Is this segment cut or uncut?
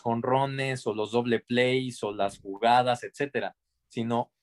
uncut